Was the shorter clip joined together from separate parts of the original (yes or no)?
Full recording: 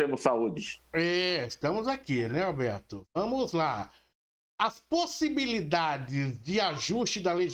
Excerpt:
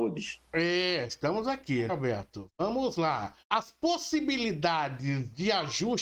yes